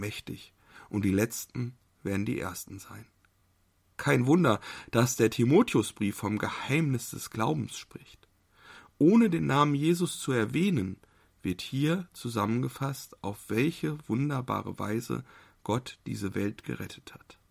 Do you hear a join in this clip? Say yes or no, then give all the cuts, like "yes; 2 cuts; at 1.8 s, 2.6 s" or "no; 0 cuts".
no; 0 cuts